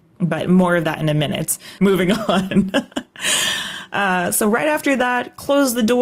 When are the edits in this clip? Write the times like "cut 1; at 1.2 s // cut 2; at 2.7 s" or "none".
cut 1; at 1.8 s